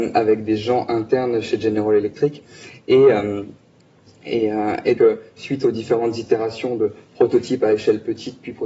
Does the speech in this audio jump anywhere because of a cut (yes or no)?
yes